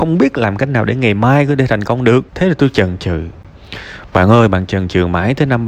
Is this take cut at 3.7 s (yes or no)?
no